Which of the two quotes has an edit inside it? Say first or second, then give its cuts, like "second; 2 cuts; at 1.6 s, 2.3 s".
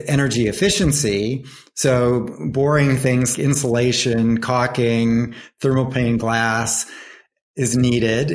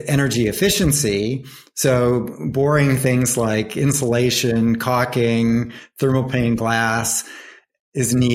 first; 1 cut; at 3.4 s